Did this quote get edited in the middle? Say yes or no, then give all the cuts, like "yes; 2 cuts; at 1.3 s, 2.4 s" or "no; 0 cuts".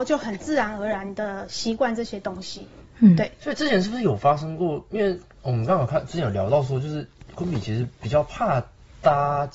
no; 0 cuts